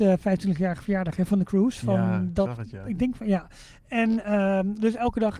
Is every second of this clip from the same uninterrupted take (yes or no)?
yes